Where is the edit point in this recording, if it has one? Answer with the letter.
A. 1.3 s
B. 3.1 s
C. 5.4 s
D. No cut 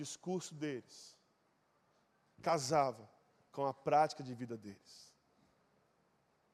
D